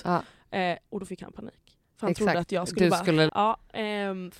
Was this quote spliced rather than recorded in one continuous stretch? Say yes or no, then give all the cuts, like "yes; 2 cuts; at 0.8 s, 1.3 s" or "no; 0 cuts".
yes; 1 cut; at 3.3 s